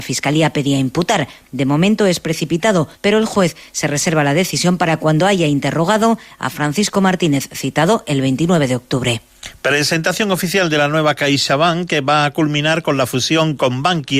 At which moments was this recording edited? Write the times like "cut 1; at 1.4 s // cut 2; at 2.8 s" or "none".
cut 1; at 2.9 s